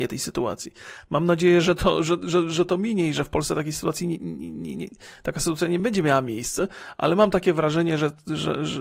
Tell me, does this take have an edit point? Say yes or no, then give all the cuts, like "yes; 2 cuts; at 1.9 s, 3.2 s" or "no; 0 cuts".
no; 0 cuts